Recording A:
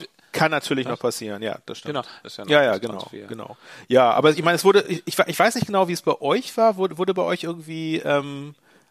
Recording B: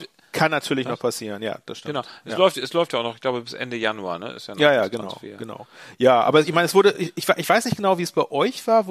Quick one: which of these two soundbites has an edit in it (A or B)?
A